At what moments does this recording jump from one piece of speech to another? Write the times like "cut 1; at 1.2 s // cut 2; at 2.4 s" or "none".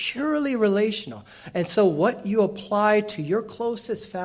none